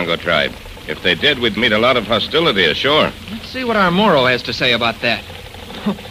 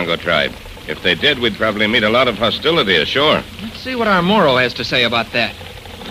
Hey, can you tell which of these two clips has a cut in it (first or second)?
first